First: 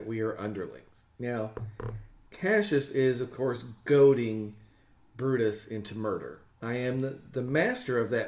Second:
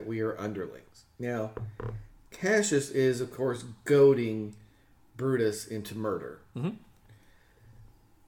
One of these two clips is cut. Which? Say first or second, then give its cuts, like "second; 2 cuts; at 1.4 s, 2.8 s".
first; 1 cut; at 6.5 s